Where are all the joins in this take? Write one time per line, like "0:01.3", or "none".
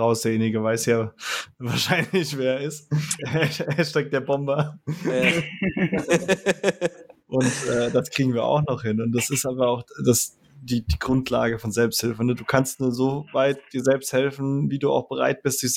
0:03.2